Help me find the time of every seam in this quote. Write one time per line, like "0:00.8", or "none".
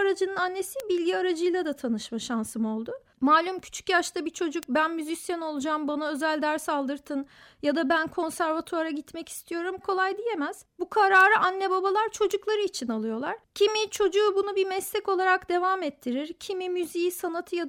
0:09.8